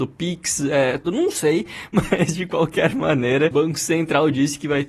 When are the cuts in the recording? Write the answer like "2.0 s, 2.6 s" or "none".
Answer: 1.0 s

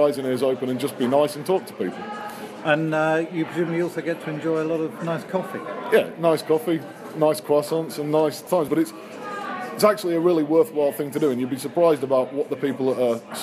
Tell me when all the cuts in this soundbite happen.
none

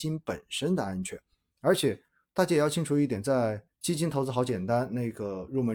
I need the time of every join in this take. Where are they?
1.5 s, 3.7 s

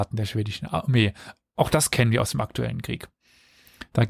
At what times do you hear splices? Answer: none

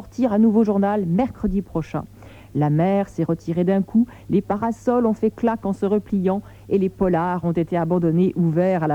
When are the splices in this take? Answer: none

